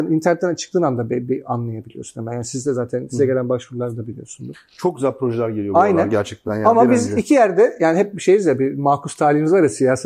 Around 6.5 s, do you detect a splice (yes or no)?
no